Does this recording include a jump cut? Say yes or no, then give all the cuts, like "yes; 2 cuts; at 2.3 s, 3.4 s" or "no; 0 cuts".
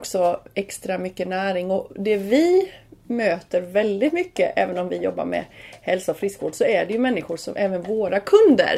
no; 0 cuts